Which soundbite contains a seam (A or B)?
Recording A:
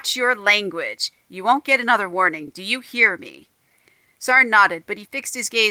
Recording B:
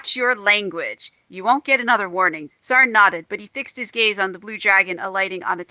B